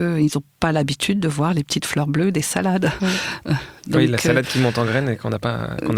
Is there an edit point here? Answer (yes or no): no